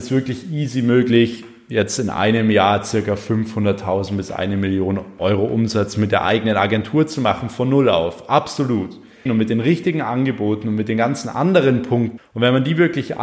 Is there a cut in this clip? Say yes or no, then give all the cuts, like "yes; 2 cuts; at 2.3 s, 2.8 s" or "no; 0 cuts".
yes; 2 cuts; at 9.3 s, 12.2 s